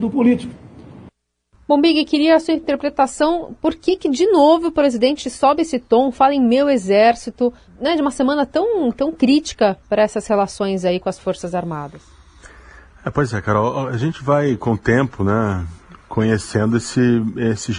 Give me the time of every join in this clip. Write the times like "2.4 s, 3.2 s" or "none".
7.7 s